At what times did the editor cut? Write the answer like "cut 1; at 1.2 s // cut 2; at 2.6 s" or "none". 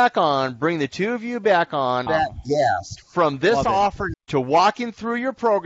cut 1; at 2.1 s // cut 2; at 4.1 s